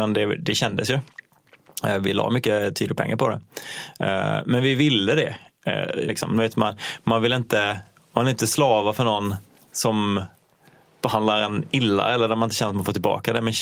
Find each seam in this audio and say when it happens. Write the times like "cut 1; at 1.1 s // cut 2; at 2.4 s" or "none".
cut 1; at 6.1 s